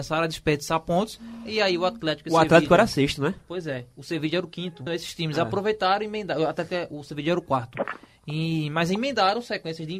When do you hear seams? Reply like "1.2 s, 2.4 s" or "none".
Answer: 4.9 s